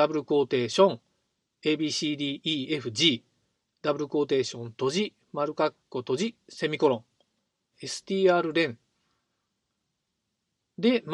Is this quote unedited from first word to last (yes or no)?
no